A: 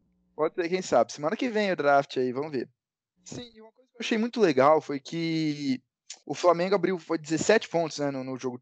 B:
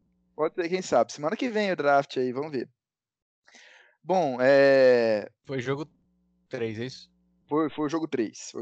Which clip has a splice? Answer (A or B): A